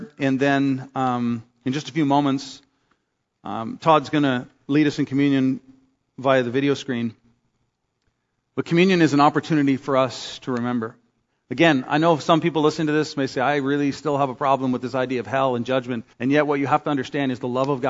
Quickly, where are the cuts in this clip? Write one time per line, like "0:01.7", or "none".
0:16.1

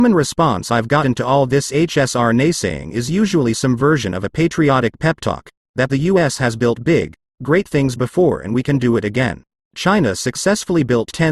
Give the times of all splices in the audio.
0:09.6

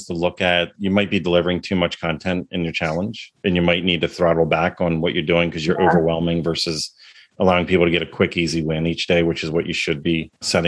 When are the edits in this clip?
none

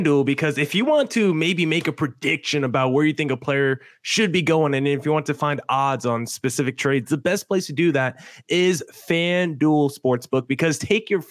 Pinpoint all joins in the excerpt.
none

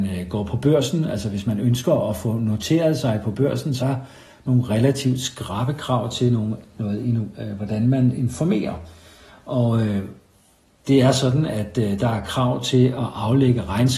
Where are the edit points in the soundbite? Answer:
0:03.8

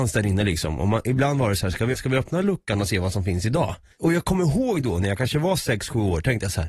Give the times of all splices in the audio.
0:01.9
0:03.9

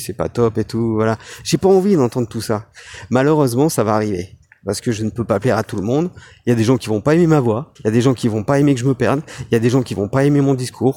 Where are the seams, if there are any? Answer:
0:07.8

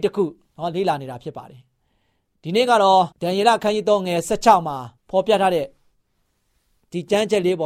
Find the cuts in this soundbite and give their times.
0:03.1
0:05.0

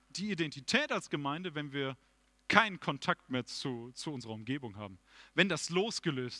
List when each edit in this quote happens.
none

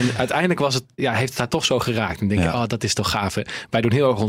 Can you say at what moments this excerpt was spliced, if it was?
0:01.0

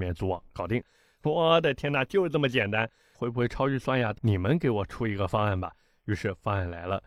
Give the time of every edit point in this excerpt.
0:03.1
0:04.1

